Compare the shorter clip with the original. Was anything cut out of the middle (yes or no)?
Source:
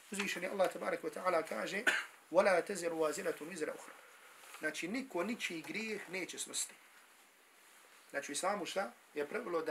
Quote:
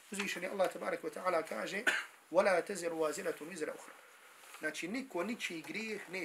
no